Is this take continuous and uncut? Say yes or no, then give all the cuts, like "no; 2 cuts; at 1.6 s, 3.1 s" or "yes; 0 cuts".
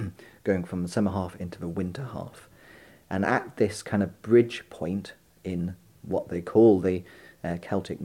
yes; 0 cuts